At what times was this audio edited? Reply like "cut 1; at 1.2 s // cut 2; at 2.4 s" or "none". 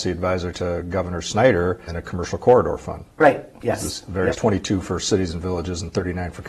cut 1; at 1.9 s // cut 2; at 4.3 s